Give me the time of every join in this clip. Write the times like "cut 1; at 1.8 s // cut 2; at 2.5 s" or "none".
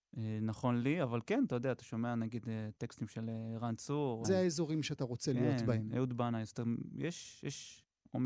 cut 1; at 4.2 s